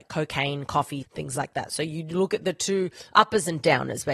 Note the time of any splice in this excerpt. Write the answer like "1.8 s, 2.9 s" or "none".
1.0 s